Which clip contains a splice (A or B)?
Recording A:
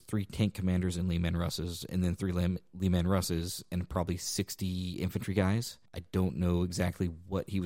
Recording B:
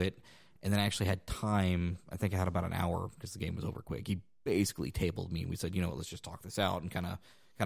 A